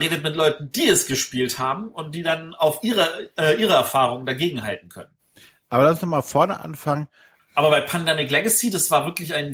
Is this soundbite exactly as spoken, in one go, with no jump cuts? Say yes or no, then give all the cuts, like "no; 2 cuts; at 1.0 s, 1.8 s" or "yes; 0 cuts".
no; 1 cut; at 7.4 s